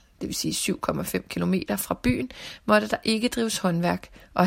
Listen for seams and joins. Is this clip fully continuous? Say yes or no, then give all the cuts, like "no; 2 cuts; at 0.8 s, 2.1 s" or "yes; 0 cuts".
yes; 0 cuts